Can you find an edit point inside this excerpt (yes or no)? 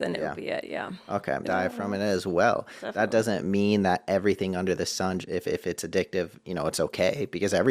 yes